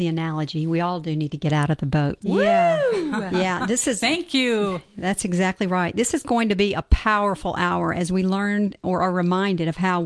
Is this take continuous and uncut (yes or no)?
no